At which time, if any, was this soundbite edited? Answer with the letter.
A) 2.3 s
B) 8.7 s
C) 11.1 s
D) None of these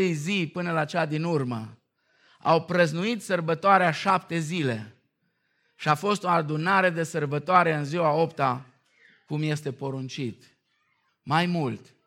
C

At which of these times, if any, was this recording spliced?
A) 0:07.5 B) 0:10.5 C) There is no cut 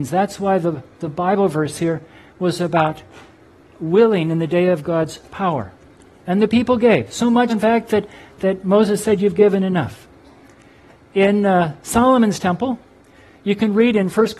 A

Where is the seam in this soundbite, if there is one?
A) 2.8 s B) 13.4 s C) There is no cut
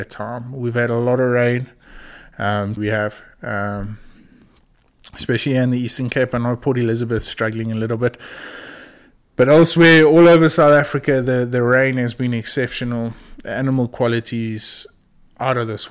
A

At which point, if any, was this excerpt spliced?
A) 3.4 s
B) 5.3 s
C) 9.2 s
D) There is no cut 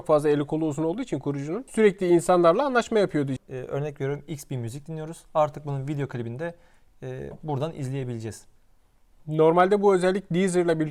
A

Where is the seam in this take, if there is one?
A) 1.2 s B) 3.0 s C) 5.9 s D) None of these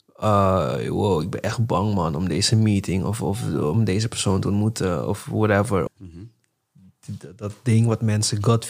C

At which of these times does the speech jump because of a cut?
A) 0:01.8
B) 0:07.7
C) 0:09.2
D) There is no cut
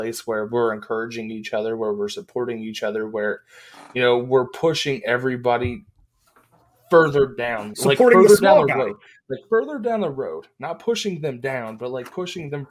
B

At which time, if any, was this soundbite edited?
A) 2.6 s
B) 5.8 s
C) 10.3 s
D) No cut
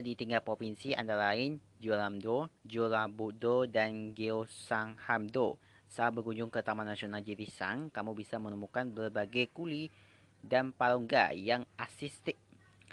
A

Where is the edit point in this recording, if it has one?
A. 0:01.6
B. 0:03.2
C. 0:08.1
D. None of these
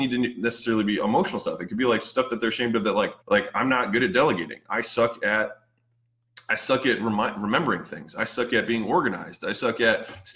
B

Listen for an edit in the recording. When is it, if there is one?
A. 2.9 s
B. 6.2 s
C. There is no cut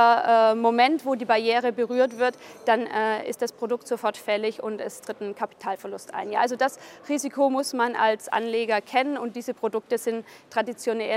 C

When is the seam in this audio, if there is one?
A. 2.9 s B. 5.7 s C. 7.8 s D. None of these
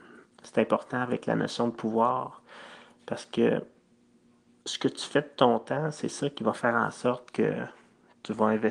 D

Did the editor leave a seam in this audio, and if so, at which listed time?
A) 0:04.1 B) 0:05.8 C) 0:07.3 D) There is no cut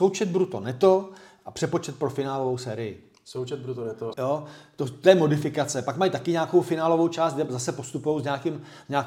A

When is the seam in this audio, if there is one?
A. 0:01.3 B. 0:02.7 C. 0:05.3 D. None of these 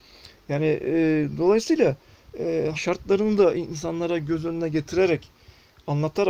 B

